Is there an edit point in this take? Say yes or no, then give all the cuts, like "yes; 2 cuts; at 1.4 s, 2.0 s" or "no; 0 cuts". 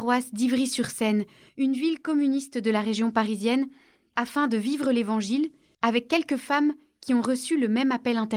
no; 0 cuts